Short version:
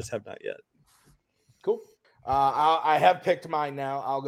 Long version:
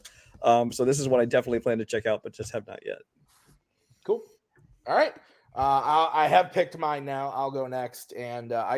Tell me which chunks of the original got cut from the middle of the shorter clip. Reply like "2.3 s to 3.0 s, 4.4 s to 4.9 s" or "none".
4.5 s to 5.3 s